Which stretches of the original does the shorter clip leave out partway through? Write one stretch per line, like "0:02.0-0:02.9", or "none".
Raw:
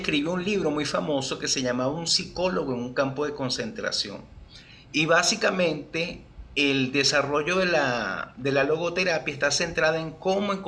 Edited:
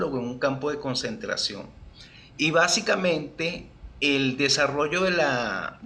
none